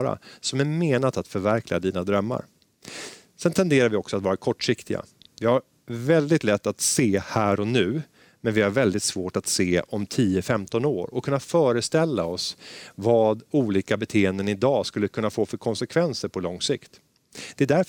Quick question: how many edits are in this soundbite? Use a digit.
0